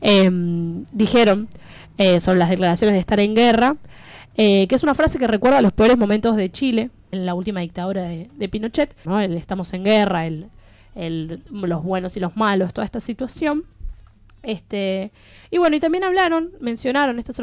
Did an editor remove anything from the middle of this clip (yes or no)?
yes